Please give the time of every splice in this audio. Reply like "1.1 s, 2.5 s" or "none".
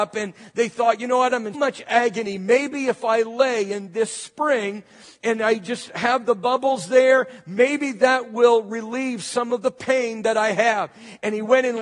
1.5 s